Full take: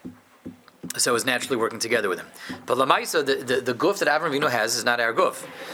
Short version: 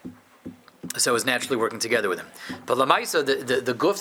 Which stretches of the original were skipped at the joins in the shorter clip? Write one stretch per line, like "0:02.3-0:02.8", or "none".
none